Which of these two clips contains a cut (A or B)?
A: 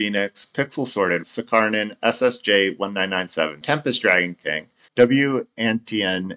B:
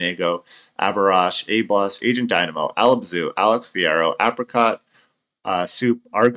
A